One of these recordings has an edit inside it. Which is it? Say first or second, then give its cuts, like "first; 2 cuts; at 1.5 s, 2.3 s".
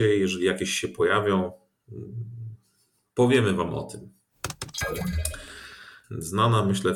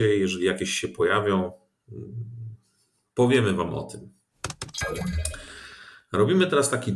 first; 1 cut; at 6.0 s